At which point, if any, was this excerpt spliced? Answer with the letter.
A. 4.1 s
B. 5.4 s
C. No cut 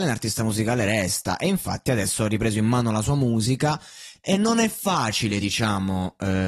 C